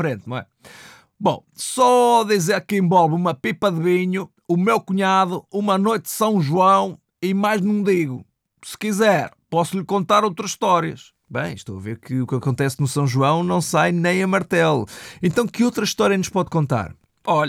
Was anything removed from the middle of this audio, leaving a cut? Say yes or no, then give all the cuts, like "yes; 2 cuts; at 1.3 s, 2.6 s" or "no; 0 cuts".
no; 0 cuts